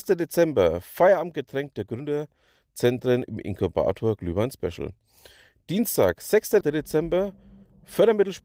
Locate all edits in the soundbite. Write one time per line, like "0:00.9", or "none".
0:06.6